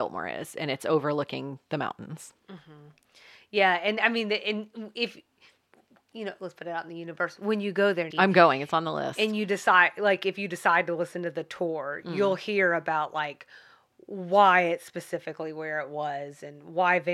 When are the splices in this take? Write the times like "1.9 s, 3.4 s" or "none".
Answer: 8.1 s